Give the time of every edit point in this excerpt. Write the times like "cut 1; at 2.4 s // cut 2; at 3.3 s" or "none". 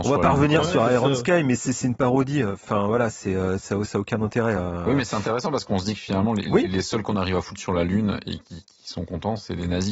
none